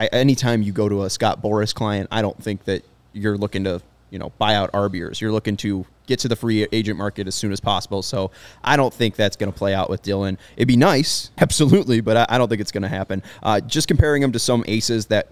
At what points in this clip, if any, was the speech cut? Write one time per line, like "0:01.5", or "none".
0:11.4